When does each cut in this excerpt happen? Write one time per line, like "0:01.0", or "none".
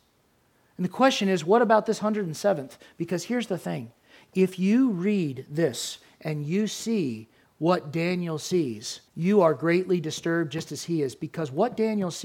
0:09.1